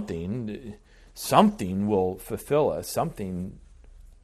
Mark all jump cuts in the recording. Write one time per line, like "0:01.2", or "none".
none